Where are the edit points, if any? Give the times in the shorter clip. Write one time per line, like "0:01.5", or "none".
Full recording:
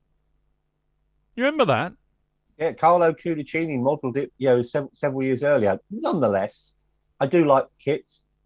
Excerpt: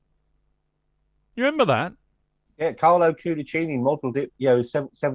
none